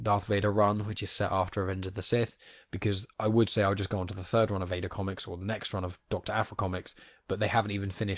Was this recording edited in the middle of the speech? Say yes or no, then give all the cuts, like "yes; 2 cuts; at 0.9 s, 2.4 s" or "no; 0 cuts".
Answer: no; 0 cuts